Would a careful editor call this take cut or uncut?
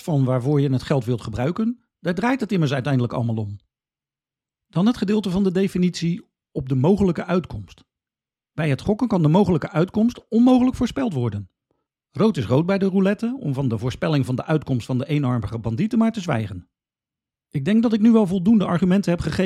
uncut